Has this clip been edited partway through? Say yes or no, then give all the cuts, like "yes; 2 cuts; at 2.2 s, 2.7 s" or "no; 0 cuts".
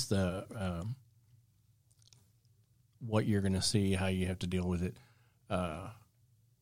no; 0 cuts